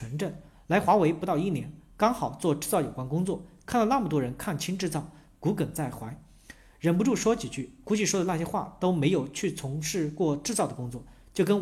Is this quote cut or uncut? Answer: uncut